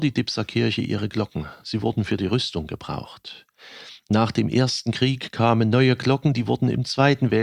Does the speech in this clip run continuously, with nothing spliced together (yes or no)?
yes